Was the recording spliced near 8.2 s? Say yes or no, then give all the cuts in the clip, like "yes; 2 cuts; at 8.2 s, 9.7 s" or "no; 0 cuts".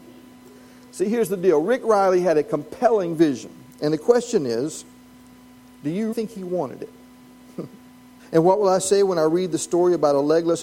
yes; 2 cuts; at 6.1 s, 8.2 s